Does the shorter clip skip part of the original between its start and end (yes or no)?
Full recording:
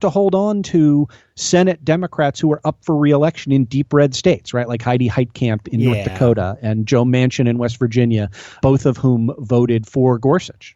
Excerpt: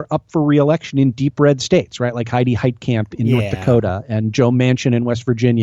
no